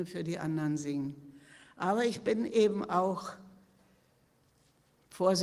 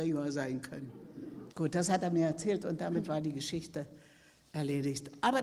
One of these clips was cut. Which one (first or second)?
second